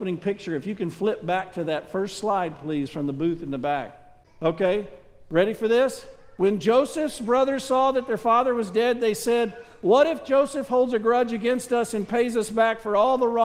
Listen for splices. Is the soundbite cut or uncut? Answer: uncut